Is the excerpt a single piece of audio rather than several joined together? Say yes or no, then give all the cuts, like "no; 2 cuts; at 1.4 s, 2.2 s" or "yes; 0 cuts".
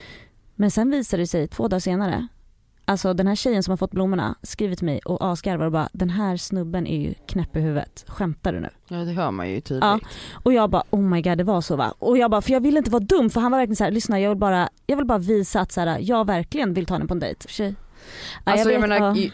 no; 1 cut; at 17.5 s